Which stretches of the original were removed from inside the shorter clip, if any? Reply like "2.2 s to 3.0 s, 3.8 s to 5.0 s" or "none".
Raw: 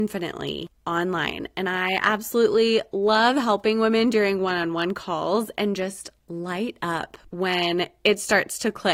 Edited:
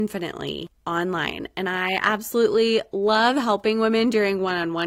none